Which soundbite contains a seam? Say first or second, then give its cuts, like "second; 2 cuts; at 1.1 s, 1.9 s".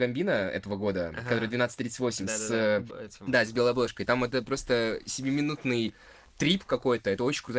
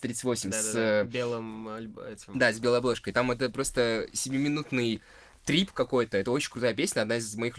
first; 1 cut; at 2.9 s